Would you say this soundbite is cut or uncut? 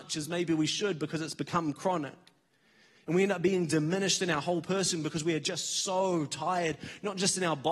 uncut